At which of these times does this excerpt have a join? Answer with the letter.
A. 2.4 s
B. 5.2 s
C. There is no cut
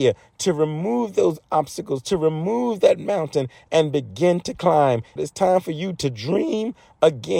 B